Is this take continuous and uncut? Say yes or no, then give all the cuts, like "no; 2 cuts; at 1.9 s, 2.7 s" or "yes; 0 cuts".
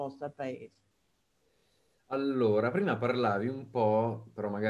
yes; 0 cuts